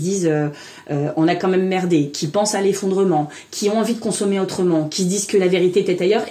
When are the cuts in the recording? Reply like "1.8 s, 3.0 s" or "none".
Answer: none